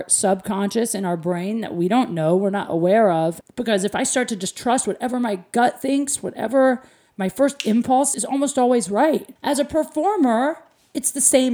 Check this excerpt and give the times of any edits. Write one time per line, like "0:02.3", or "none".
0:03.4
0:08.1
0:09.4